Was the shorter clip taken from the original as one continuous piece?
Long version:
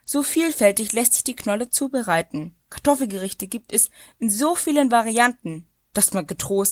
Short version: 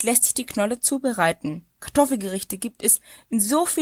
yes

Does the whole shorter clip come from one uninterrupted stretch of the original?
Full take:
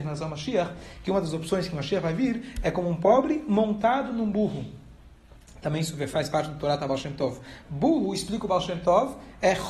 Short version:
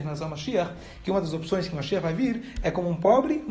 yes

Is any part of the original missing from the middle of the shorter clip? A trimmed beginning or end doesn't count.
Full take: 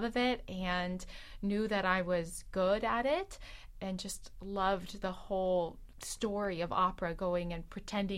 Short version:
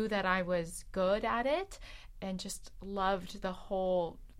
no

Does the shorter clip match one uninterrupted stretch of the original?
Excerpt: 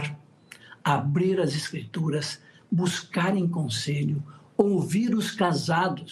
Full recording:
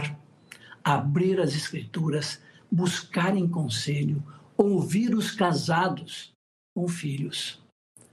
yes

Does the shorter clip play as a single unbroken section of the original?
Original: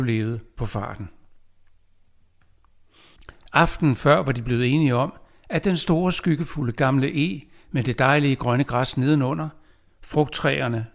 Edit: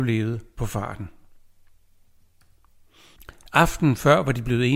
yes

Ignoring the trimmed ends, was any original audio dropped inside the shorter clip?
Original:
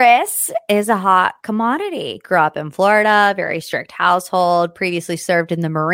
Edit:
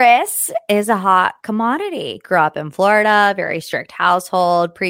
no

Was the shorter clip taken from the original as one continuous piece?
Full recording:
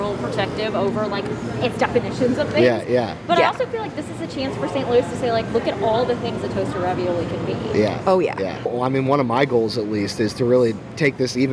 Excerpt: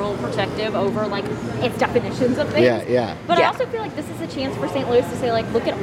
yes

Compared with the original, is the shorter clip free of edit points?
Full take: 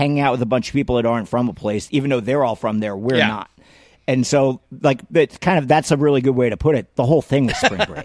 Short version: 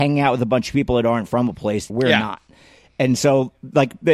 no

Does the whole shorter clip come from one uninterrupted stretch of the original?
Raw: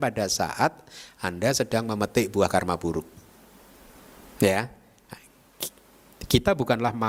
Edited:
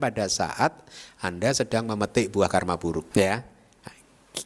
no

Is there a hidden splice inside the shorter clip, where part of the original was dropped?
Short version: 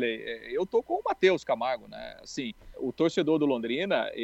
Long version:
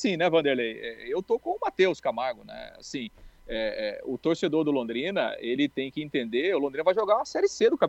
yes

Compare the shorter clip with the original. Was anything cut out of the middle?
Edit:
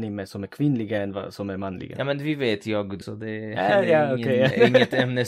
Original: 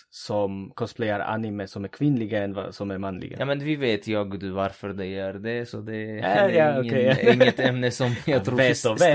yes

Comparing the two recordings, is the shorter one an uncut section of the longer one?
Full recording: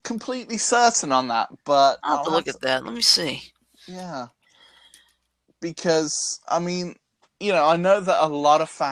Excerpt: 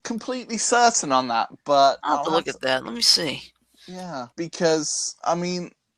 no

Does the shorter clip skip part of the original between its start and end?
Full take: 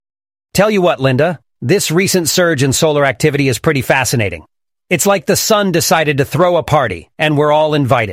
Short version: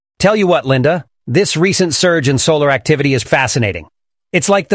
yes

